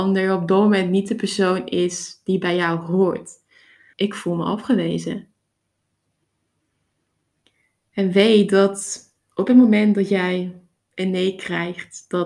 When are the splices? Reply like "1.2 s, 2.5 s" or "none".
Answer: 3.9 s